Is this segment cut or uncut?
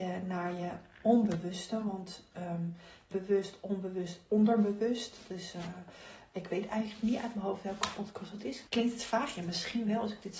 cut